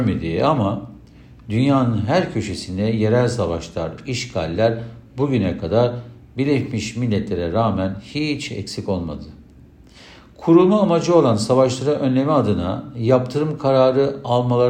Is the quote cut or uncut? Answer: uncut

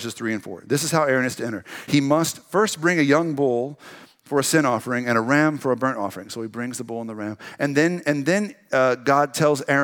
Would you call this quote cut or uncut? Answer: uncut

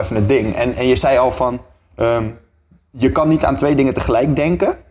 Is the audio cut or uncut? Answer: uncut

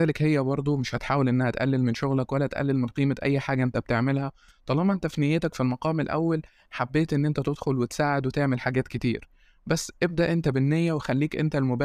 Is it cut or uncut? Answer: uncut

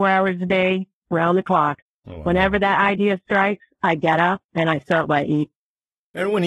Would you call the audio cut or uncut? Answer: uncut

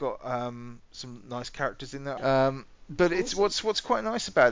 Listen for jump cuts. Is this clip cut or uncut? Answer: cut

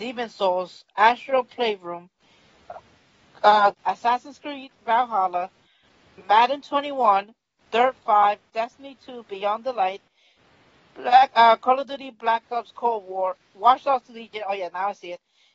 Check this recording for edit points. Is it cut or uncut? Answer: cut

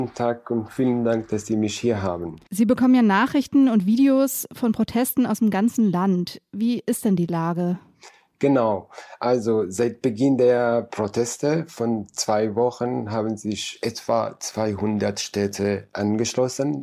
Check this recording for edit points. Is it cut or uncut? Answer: cut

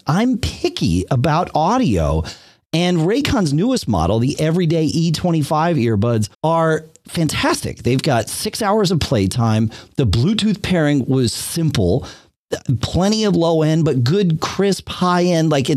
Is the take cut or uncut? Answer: cut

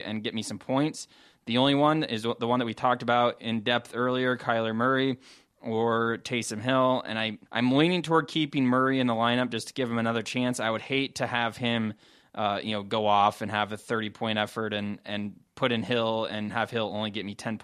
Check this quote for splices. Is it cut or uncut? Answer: cut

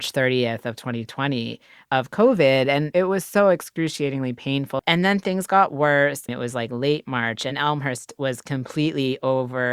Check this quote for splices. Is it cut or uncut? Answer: cut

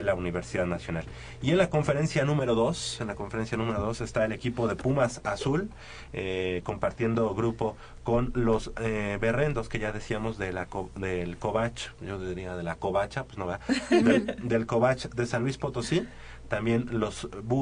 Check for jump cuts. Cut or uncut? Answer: cut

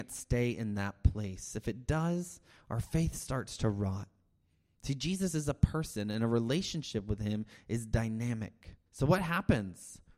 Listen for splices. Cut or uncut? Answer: cut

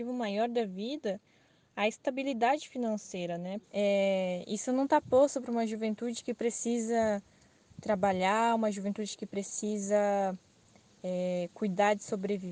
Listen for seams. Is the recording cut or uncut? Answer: cut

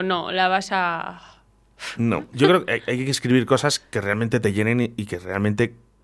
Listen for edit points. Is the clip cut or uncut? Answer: cut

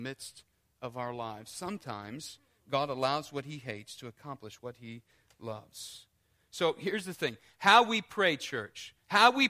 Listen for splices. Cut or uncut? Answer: uncut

